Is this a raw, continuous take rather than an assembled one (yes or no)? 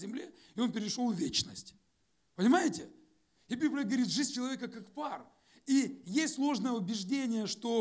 yes